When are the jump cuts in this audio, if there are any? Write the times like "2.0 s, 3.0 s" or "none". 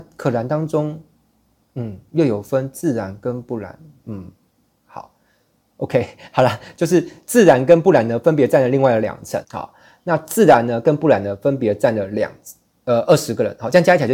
9.4 s